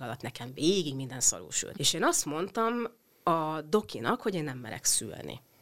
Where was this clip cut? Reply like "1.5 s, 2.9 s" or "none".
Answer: 1.7 s

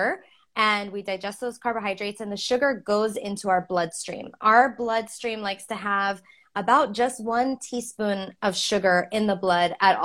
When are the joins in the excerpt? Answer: none

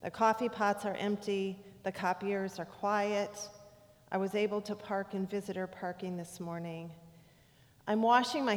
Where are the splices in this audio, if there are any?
none

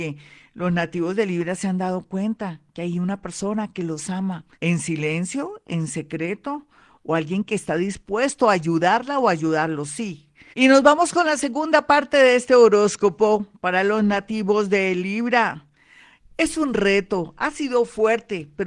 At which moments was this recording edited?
4.5 s, 10.5 s

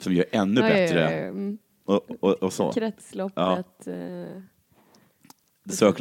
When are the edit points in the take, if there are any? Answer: none

